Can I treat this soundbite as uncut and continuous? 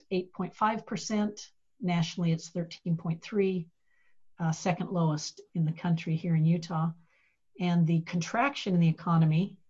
yes; 0 cuts

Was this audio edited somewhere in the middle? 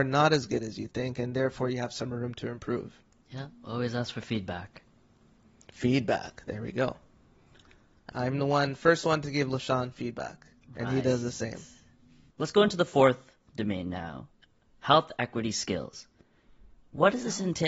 yes; 1 cut; at 8.1 s

